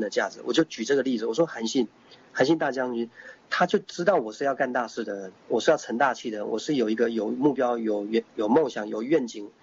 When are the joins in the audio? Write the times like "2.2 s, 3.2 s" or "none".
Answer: none